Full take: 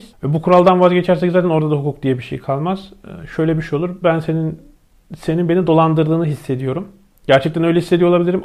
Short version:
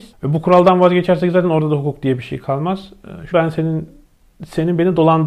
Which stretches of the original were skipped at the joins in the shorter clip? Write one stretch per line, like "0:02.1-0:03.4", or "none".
0:03.3-0:04.0